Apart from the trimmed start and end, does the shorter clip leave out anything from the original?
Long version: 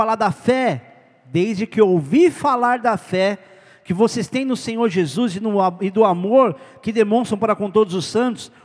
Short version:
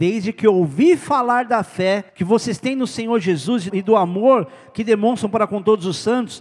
yes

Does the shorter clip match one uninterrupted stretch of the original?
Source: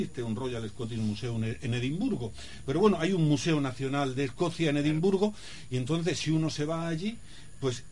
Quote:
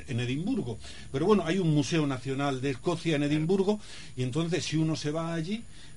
yes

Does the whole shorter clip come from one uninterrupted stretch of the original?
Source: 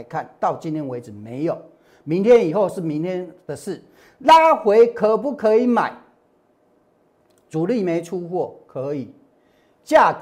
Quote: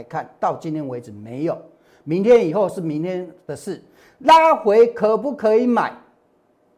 yes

